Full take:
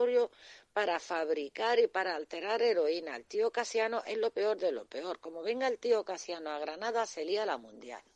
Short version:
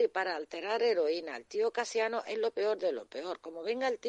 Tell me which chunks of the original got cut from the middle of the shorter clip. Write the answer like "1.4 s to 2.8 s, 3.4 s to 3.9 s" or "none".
none